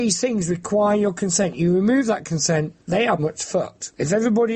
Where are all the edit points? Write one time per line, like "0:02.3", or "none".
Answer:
0:03.2